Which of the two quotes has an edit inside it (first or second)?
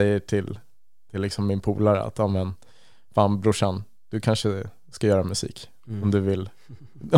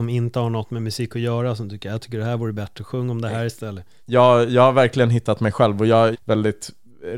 second